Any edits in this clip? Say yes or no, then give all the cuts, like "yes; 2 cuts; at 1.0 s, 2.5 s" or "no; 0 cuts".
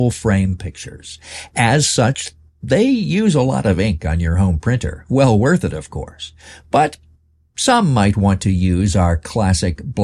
no; 0 cuts